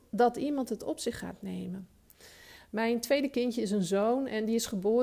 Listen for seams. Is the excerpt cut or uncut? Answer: cut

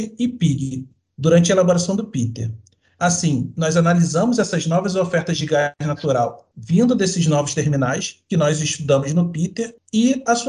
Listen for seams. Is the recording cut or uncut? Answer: uncut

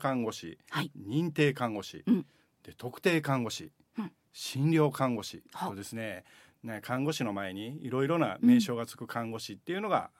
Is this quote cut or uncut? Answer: uncut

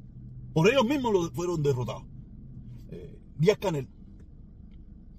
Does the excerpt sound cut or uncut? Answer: cut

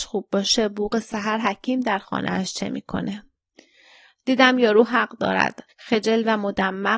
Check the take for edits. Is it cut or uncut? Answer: uncut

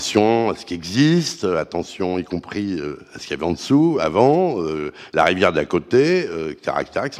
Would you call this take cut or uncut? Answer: uncut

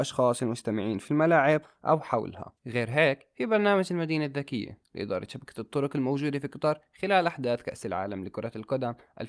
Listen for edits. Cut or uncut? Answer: cut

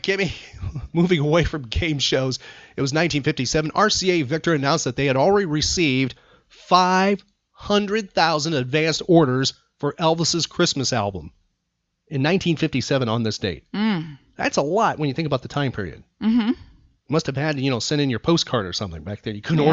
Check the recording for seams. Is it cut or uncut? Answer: uncut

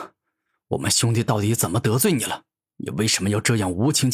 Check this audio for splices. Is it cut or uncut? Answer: uncut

